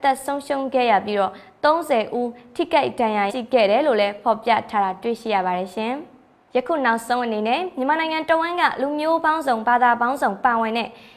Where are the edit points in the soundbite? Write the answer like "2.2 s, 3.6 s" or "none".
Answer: 3.3 s